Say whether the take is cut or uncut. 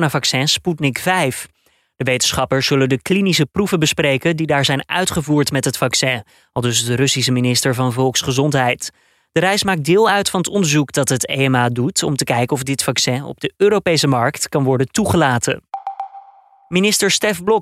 uncut